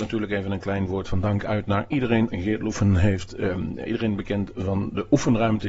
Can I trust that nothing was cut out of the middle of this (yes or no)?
no